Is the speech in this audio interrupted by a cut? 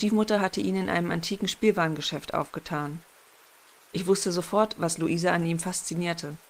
no; 0 cuts

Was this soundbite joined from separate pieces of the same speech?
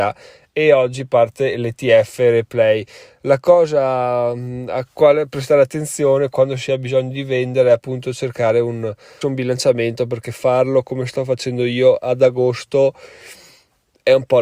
yes; 1 cut; at 9.2 s

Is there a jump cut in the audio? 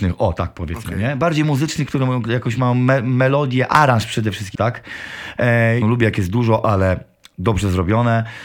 yes; 2 cuts; at 4.6 s, 5.8 s

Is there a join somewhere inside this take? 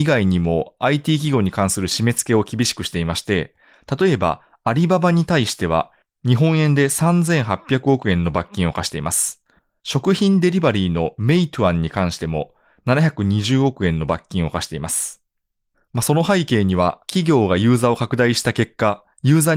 no; 0 cuts

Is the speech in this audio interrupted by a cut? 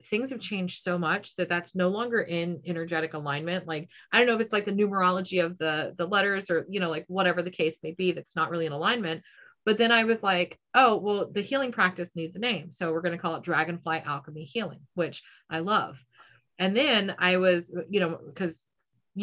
no; 0 cuts

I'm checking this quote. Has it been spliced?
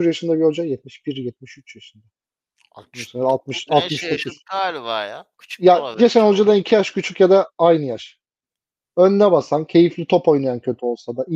yes; 3 cuts; at 3.7 s, 5.3 s, 8.8 s

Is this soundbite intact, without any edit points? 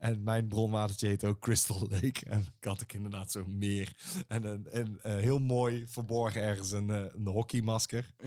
yes; 0 cuts

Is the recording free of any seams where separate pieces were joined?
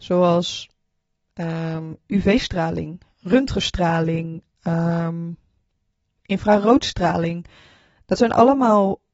yes; 0 cuts

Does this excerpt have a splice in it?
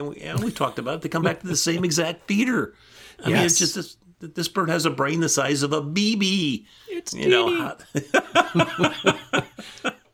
no; 0 cuts

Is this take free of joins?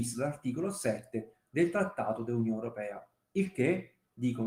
yes; 0 cuts

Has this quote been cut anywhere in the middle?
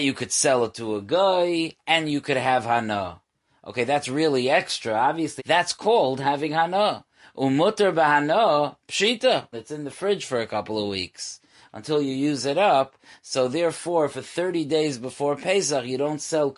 yes; 2 cuts; at 5.4 s, 9.5 s

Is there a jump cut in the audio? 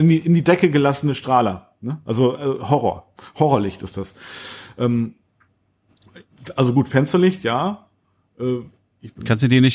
no; 0 cuts

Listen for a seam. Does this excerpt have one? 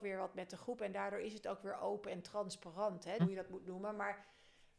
yes; 1 cut; at 3.2 s

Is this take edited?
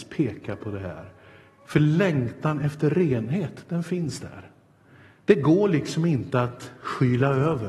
no; 0 cuts

